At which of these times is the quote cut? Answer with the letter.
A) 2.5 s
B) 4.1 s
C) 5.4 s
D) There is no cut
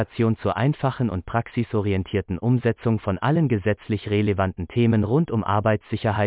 D